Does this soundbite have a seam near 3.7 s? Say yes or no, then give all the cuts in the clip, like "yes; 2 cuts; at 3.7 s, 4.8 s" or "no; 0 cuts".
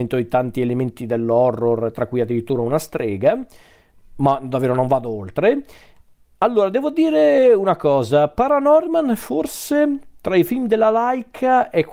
no; 0 cuts